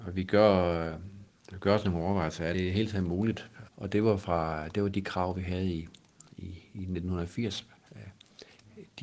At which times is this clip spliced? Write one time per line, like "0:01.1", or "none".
0:02.5
0:03.7